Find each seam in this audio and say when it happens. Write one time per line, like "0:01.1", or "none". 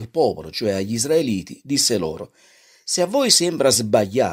none